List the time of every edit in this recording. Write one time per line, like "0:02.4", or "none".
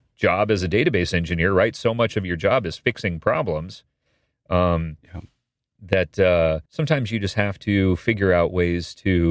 0:06.7